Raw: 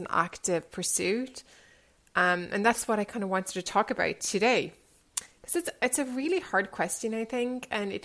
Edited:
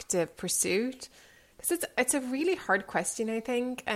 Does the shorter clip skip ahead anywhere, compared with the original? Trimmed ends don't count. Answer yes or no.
yes